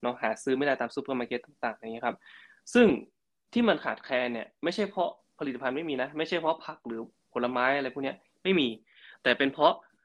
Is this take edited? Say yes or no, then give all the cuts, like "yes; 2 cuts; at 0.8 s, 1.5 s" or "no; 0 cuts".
no; 0 cuts